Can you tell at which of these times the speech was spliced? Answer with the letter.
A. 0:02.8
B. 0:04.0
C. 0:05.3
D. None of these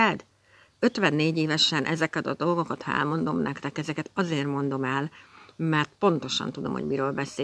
D